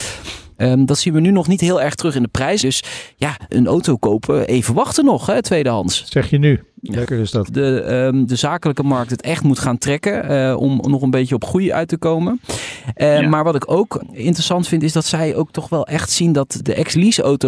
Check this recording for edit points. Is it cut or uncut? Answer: cut